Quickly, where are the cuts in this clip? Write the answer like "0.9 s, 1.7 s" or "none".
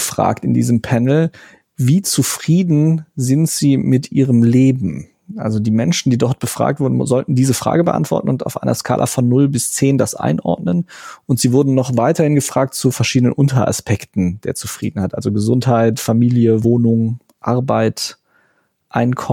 none